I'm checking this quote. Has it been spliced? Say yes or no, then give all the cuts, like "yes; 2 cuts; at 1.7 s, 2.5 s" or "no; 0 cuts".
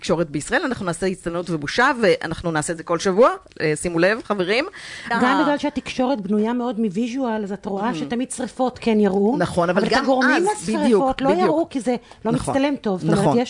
yes; 1 cut; at 5.1 s